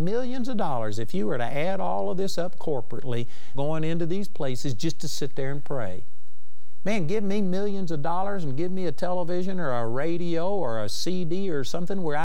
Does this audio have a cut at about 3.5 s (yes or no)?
yes